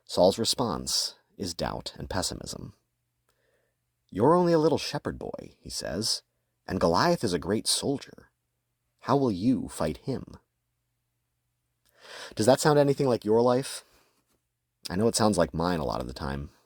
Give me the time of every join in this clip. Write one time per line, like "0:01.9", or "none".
none